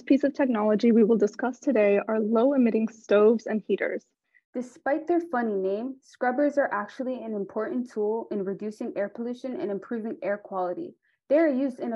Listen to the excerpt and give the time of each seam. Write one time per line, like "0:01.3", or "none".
0:04.4